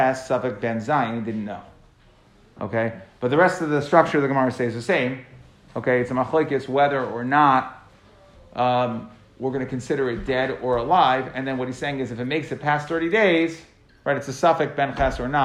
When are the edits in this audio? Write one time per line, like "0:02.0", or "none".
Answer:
none